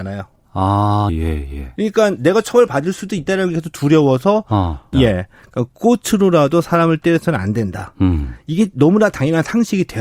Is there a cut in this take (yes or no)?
yes